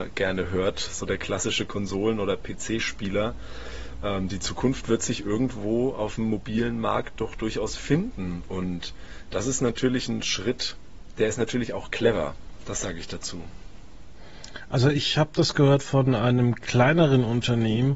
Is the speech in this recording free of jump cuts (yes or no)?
yes